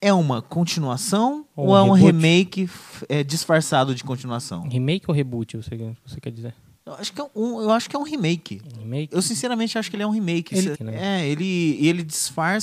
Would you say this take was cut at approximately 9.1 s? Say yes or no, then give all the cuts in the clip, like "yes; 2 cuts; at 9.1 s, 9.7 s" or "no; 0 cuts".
no; 1 cut; at 10.7 s